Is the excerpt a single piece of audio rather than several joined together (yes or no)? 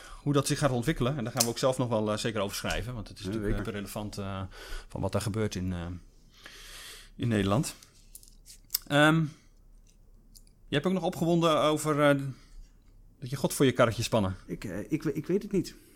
no